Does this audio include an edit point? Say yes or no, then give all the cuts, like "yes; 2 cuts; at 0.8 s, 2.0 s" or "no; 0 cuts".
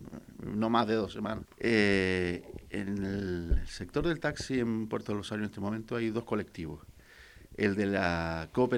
yes; 1 cut; at 1.4 s